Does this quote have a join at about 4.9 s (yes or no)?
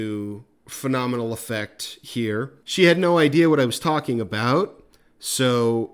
no